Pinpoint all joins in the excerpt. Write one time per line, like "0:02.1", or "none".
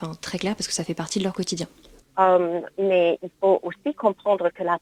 0:02.0